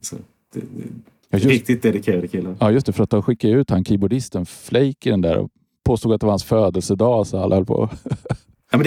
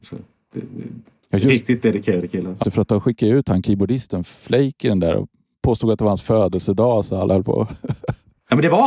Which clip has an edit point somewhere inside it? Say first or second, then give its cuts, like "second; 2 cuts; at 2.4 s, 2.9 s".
second; 1 cut; at 2.6 s